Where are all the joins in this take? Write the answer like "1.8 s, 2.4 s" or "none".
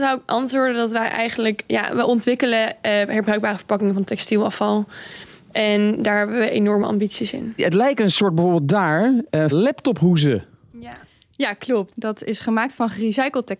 9.5 s, 11.9 s

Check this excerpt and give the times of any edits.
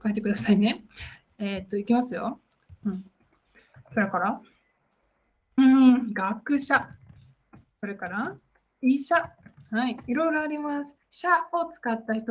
2.8 s, 11.0 s

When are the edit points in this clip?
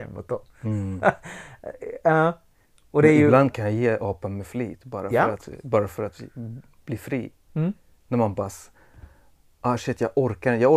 none

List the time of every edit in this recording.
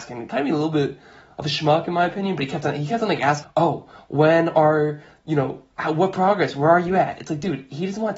3.4 s

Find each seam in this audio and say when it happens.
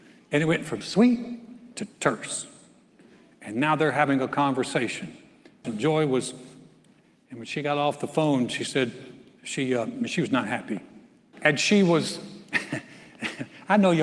5.6 s, 11.3 s

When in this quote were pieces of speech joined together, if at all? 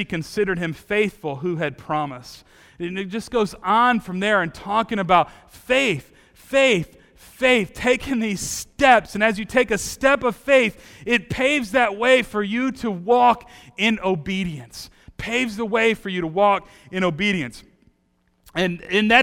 none

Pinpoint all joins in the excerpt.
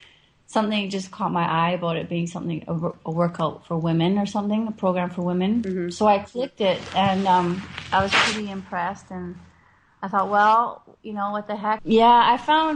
11.8 s

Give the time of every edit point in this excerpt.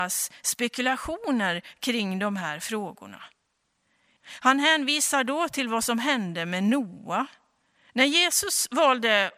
4.2 s, 7.9 s

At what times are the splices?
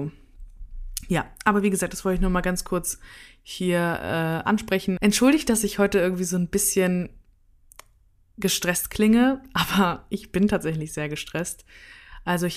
5.0 s

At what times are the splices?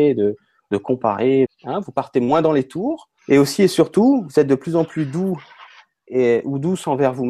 1.5 s, 3.2 s

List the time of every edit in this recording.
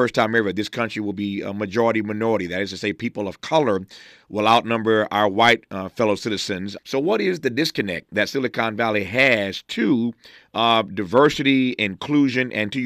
6.8 s

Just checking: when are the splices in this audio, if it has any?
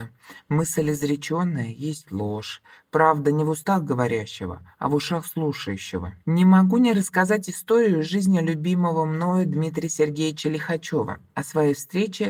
6.2 s

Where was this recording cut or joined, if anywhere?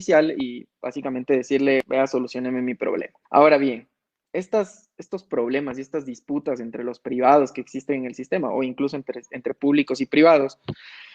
3.2 s

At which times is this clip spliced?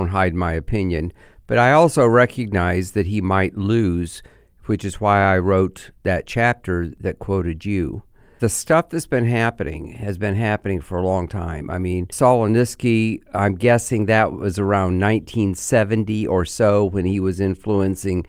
none

